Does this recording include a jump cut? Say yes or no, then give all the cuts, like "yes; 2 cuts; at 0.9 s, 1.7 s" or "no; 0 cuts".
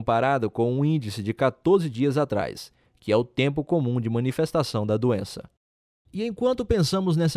no; 0 cuts